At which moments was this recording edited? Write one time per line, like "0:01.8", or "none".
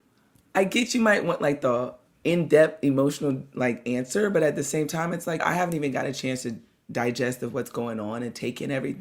0:05.4